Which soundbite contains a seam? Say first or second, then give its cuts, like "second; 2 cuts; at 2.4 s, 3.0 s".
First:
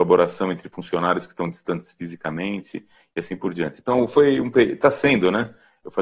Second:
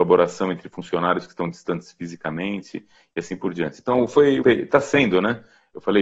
second; 1 cut; at 4.4 s